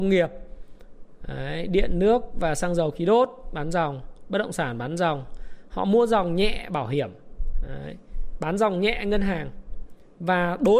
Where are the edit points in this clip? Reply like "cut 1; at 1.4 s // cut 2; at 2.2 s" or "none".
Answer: none